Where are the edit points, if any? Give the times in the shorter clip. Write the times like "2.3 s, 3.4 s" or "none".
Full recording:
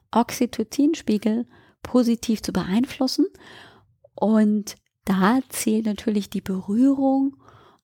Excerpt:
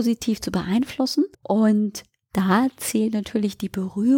1.3 s